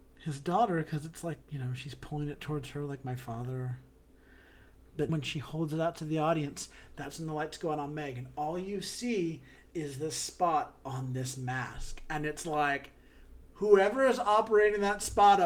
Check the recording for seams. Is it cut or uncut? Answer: cut